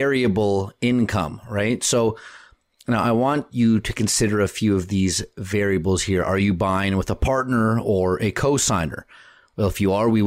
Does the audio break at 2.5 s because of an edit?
no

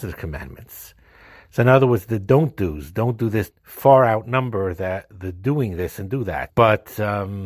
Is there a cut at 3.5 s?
yes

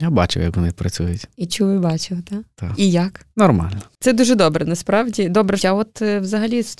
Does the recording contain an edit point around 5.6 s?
yes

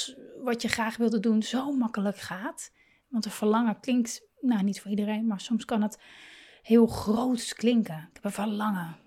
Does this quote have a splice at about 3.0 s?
yes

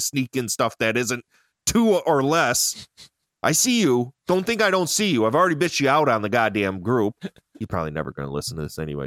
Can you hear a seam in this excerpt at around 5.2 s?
no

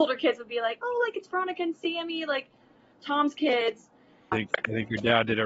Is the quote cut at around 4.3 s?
yes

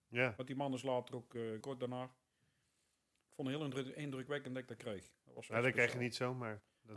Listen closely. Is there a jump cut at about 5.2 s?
no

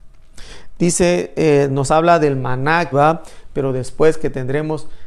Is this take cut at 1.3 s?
no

